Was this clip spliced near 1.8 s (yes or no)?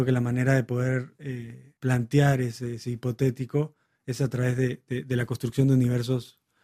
yes